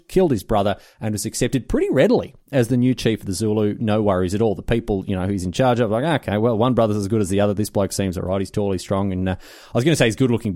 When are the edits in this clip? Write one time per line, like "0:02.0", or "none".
none